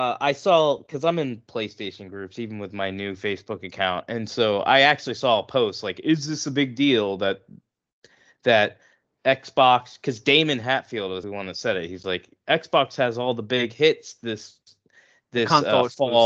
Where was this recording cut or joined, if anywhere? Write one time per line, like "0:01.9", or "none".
0:11.2